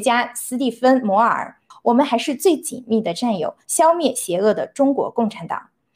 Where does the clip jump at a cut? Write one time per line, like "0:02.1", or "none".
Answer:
0:01.7
0:03.7